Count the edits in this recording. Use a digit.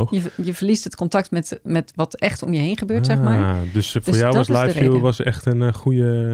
0